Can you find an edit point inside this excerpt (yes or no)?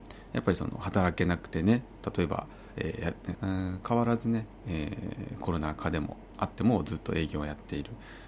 yes